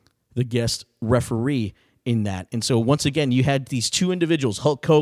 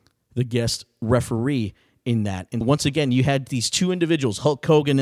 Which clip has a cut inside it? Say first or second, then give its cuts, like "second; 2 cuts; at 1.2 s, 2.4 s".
second; 1 cut; at 2.6 s